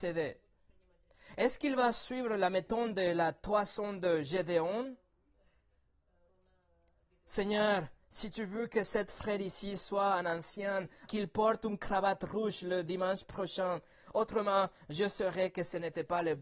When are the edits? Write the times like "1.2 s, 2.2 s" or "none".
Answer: 8.0 s, 11.1 s